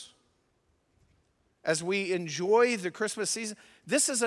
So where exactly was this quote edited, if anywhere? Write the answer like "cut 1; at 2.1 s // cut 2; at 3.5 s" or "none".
none